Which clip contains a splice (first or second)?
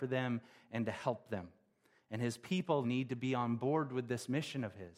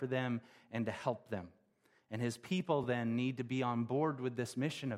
first